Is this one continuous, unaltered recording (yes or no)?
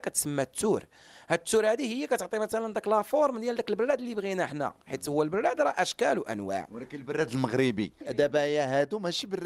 no